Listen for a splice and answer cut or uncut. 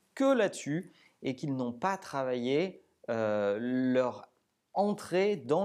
uncut